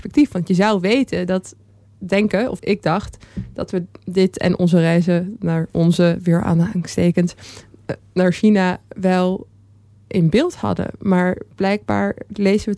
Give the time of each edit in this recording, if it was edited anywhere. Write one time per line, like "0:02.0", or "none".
0:02.6